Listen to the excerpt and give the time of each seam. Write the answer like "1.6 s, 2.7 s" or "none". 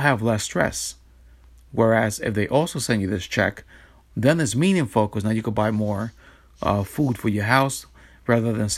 none